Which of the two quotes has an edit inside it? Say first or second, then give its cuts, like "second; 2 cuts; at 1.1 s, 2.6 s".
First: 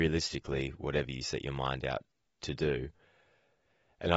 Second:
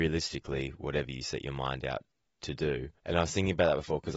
second; 1 cut; at 3.0 s